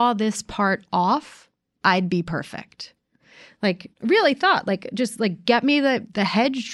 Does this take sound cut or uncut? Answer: cut